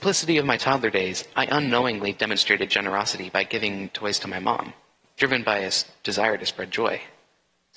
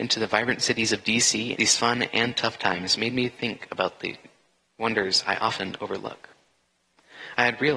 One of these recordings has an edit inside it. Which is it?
second; 1 cut; at 1.5 s

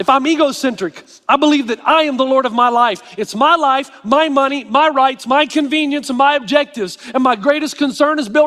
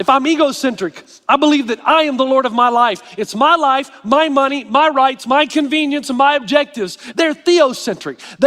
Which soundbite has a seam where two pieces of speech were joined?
second; 1 cut; at 7.1 s

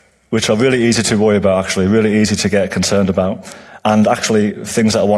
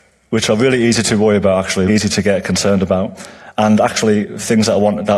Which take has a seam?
second; 1 cut; at 1.9 s

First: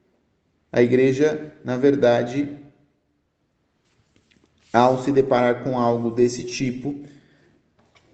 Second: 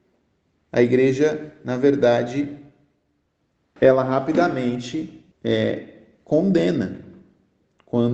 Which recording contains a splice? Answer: second; 2 cuts; at 3.8 s, 5.3 s

